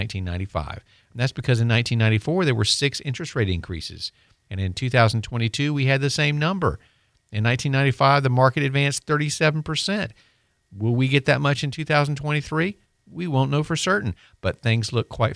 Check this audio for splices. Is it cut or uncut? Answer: uncut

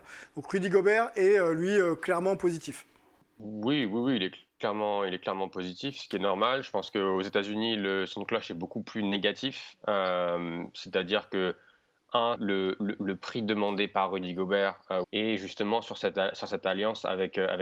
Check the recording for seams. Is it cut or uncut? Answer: cut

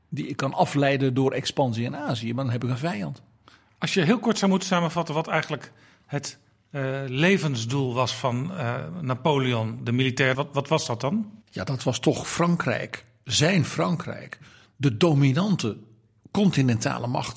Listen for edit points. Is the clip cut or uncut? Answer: cut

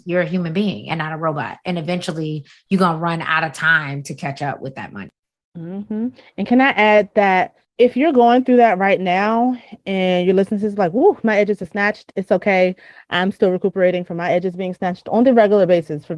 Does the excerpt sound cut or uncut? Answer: uncut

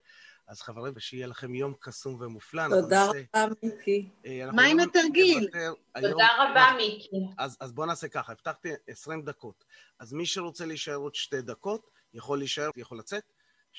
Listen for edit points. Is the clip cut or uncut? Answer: cut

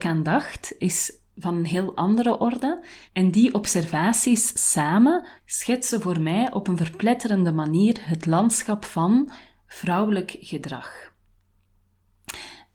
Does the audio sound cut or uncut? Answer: cut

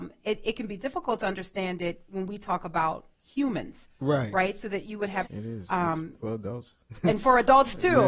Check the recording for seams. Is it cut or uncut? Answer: cut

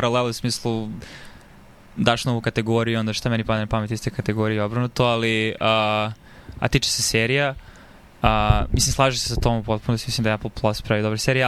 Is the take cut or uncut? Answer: uncut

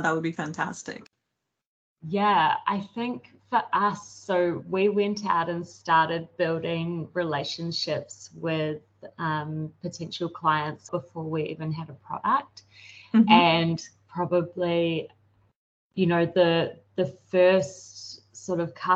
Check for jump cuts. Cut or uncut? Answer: cut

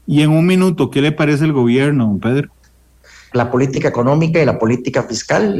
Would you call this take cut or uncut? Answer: cut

